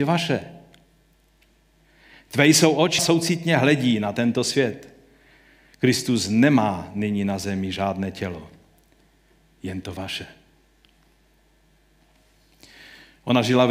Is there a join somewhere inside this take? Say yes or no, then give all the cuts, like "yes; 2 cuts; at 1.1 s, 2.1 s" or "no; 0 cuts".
yes; 1 cut; at 3.0 s